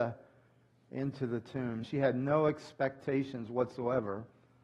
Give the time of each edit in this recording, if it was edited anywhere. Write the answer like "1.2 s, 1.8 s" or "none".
1.8 s